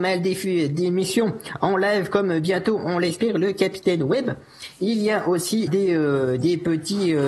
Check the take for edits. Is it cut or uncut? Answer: cut